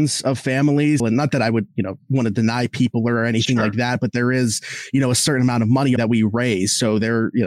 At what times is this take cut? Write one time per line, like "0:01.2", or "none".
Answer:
0:01.0
0:06.0